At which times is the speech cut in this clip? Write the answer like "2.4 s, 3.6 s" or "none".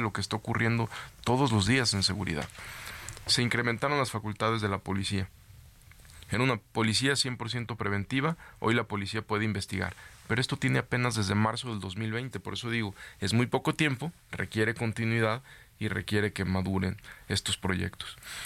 none